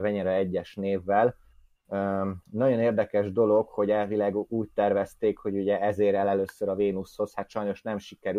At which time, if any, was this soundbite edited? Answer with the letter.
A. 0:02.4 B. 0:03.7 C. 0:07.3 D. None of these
A